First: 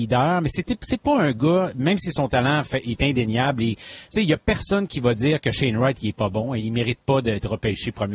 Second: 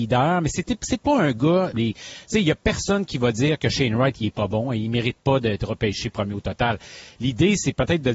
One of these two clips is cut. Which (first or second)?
second